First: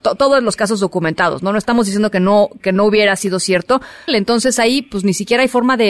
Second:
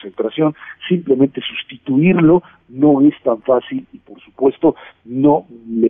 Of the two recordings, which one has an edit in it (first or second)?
first